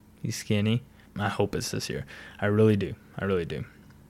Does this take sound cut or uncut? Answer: cut